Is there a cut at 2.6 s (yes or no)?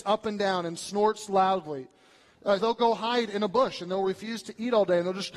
yes